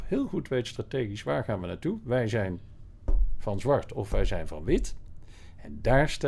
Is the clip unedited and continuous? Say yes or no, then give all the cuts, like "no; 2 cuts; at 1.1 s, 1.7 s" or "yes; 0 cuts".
yes; 0 cuts